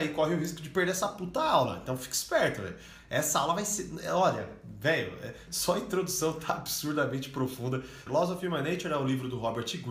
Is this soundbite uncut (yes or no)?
no